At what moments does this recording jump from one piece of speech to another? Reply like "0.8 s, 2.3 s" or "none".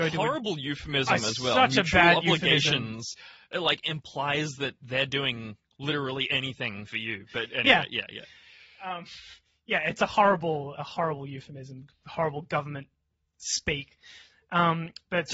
10.8 s